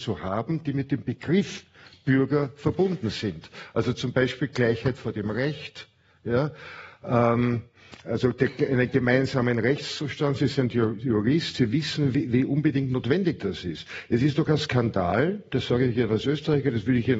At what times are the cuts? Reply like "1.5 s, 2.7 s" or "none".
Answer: none